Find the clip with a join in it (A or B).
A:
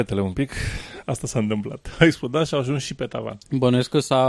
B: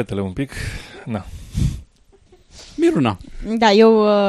A